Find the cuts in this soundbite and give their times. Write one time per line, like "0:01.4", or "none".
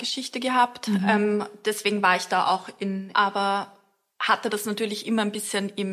0:03.1